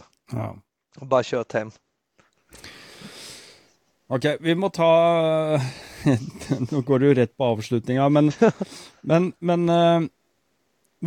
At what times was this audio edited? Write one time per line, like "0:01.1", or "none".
none